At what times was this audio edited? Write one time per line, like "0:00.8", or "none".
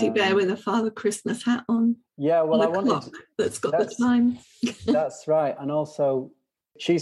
none